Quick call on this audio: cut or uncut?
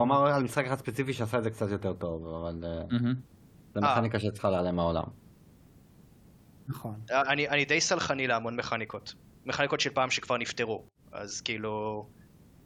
cut